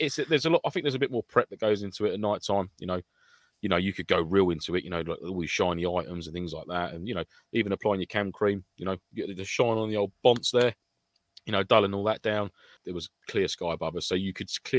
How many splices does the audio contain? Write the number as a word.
one